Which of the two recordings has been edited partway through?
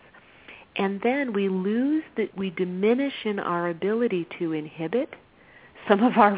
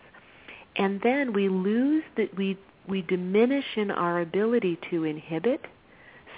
first; 1 cut; at 2.3 s

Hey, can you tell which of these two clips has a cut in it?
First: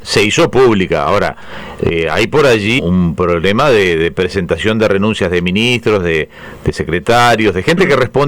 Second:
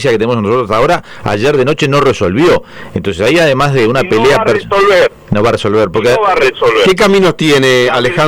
first; 1 cut; at 2.8 s

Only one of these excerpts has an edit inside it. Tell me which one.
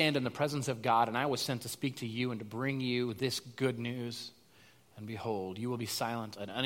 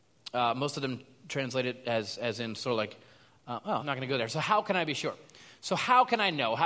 second; 1 cut; at 3.8 s

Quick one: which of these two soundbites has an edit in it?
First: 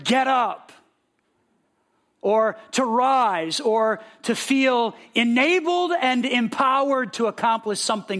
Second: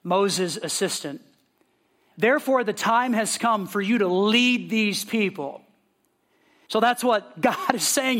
second; 2 cuts; at 2.1 s, 6.7 s

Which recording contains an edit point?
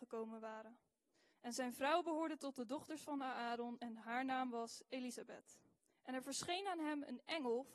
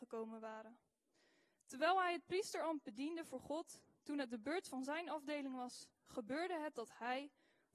first; 2 cuts; at 1.3 s, 5.9 s

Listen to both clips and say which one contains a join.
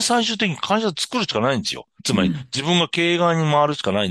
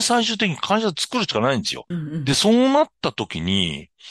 second; 1 cut; at 1.9 s

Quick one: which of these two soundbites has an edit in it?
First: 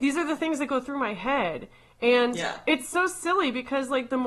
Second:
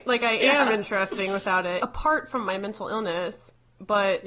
second; 1 cut; at 1.8 s

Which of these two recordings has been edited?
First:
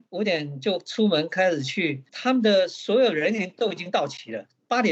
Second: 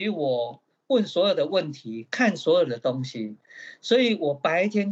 first; 1 cut; at 2.1 s

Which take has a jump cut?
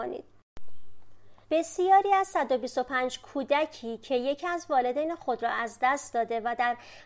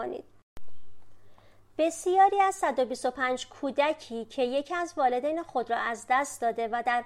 first; 1 cut; at 1.4 s

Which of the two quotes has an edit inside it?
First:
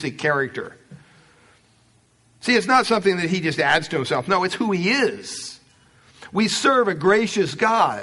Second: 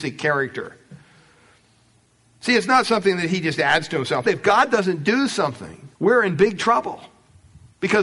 second; 2 cuts; at 4.2 s, 5.9 s

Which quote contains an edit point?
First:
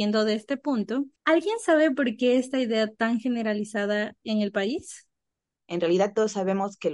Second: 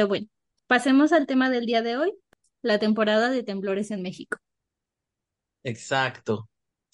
first; 2 cuts; at 1.2 s, 5.6 s

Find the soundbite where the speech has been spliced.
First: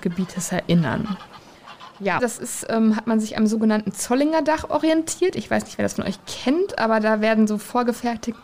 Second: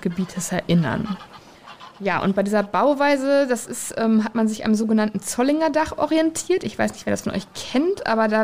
first; 1 cut; at 2.2 s

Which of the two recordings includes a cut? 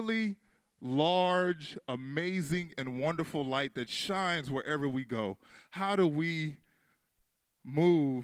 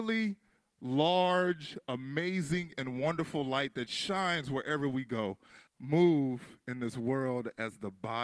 second; 1 cut; at 5.7 s

